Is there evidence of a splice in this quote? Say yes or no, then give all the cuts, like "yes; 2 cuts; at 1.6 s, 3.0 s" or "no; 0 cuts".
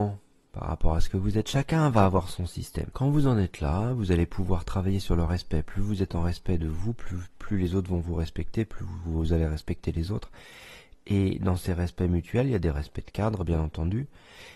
yes; 1 cut; at 2.9 s